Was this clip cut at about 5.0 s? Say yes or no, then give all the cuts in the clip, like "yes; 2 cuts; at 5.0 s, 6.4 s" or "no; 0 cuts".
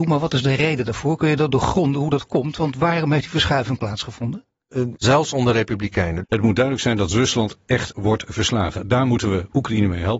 yes; 2 cuts; at 5.0 s, 6.2 s